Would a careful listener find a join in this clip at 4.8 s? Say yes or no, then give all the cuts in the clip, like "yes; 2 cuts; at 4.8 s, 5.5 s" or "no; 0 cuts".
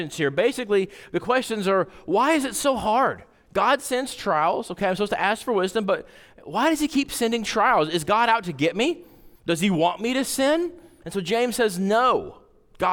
no; 2 cuts; at 9.4 s, 11.0 s